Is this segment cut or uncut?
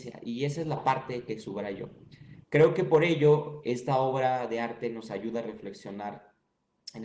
cut